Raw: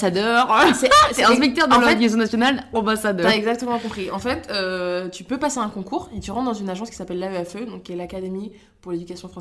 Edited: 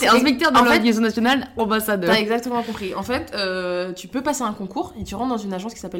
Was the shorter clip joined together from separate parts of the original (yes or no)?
no